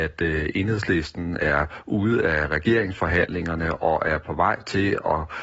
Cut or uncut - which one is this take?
uncut